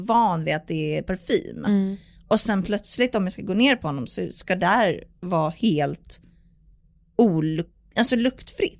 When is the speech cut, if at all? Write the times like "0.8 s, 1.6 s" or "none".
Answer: none